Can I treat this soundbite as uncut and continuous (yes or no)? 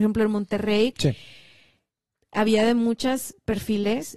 no